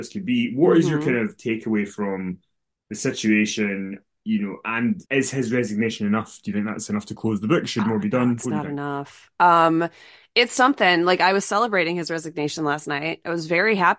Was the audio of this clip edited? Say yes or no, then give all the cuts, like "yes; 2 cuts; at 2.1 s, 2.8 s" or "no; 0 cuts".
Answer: yes; 1 cut; at 5.1 s